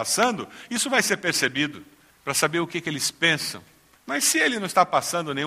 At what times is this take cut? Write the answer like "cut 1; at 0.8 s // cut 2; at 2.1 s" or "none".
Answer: cut 1; at 2.1 s // cut 2; at 4.0 s